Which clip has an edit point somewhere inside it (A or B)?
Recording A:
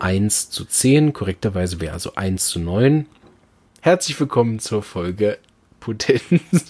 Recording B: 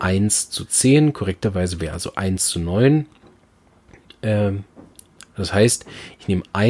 A